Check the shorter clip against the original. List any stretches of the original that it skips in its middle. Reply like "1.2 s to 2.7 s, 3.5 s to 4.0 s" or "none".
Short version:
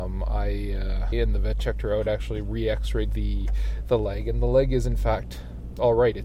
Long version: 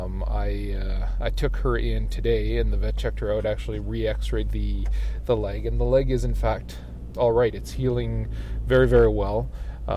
1.1 s to 2.5 s